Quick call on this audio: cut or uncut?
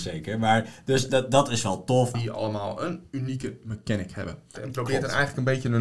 cut